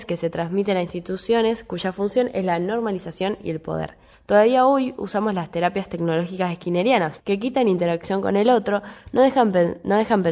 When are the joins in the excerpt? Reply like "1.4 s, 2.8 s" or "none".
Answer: 4.1 s, 7.2 s